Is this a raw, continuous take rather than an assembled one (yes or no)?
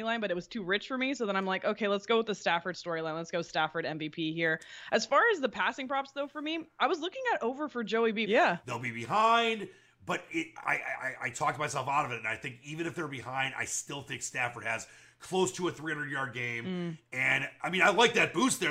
no